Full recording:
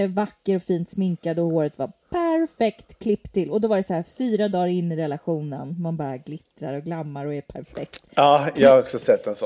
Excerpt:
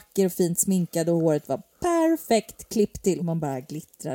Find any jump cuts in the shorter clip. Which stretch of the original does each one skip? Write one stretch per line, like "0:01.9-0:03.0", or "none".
0:03.5-0:05.8